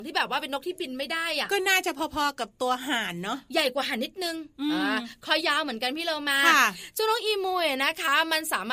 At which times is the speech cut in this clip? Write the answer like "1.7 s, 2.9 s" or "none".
5.4 s